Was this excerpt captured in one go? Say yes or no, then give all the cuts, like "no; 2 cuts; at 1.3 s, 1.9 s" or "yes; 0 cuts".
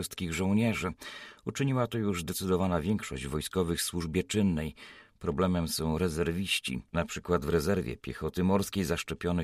yes; 0 cuts